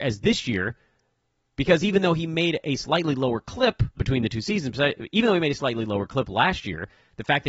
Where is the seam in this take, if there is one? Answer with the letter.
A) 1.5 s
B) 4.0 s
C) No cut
B